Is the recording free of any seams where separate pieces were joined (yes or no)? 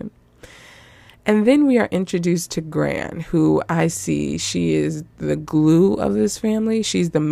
yes